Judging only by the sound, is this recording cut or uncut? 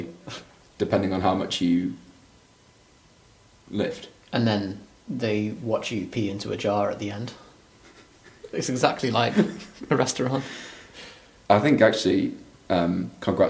uncut